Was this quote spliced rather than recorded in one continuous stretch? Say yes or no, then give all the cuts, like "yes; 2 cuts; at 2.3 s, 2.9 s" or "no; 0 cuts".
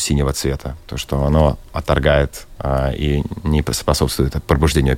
no; 0 cuts